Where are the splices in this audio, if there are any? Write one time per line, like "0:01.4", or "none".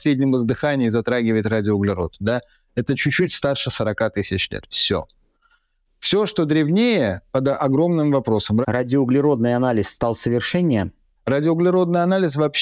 0:08.6